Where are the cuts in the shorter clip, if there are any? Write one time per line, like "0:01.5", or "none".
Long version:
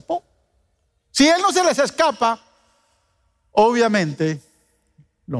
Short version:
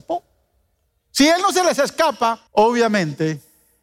0:02.5